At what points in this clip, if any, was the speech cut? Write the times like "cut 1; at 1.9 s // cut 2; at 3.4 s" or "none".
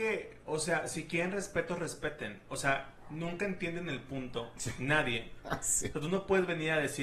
cut 1; at 5.9 s